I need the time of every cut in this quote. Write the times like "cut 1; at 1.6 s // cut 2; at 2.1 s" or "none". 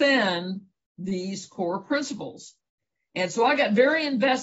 none